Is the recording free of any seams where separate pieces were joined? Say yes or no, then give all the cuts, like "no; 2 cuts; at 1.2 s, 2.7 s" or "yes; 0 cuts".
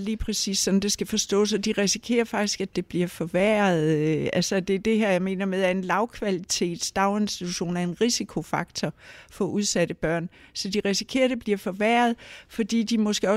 yes; 0 cuts